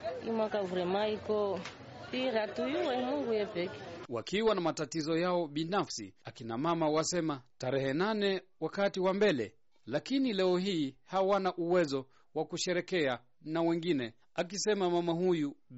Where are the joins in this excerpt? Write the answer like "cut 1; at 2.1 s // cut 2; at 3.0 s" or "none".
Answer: none

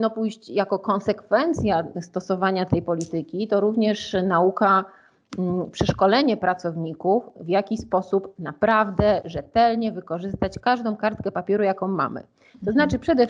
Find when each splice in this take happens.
none

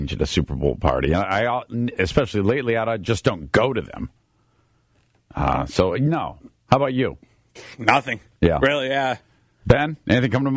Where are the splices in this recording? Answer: none

